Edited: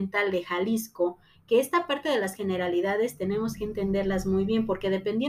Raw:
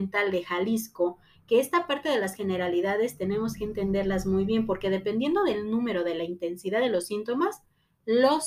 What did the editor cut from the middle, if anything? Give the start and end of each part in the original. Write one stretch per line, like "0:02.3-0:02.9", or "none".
none

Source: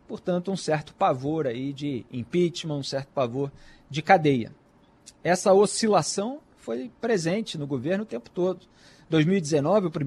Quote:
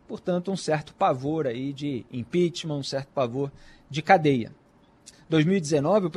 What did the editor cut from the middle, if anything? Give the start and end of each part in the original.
0:05.1-0:08.9

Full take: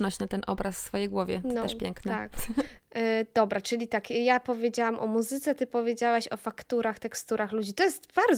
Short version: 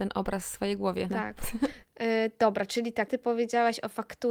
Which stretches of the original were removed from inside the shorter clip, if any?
0:01.4-0:02.0
0:04.0-0:05.6

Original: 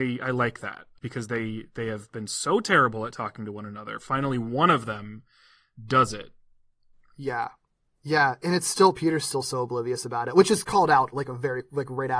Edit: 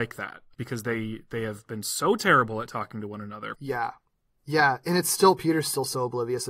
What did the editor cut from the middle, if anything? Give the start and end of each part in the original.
0:04.0-0:07.1

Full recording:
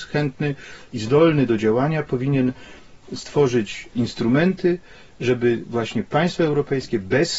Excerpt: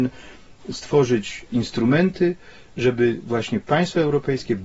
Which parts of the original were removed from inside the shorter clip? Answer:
none

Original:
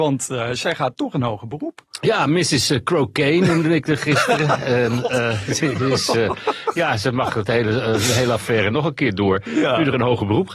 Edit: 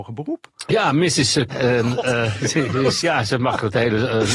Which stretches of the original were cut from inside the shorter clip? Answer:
0:02.8-0:04.6
0:06.1-0:06.7

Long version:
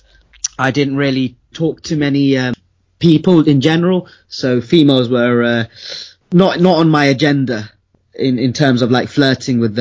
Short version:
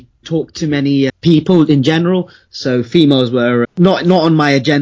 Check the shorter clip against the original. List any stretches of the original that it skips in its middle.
0:02.4-0:02.9
0:05.4-0:06.2

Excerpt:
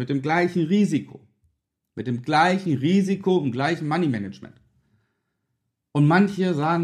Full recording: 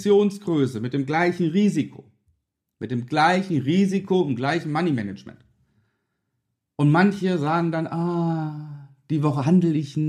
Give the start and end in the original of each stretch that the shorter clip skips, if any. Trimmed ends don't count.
none

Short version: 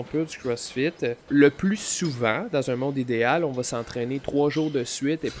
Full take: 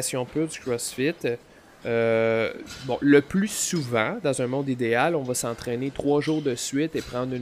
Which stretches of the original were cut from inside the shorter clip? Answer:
0:01.5-0:03.0

